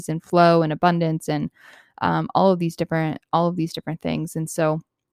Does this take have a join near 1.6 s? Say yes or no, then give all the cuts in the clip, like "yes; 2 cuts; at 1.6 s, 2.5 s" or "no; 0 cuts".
no; 0 cuts